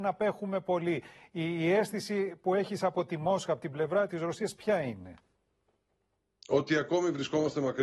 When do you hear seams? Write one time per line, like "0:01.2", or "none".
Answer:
none